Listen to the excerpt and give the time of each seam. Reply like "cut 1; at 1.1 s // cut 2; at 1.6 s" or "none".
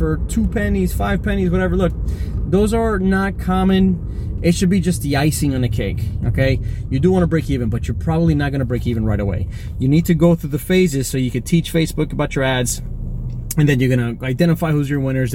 cut 1; at 4.4 s